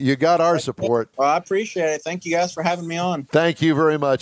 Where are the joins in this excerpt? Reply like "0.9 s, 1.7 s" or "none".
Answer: 1.1 s